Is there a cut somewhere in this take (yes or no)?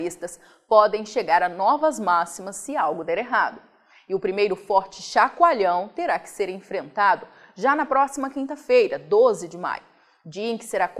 no